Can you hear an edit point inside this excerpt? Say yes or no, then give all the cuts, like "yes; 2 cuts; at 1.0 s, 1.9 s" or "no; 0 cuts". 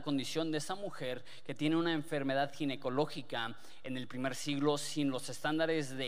no; 0 cuts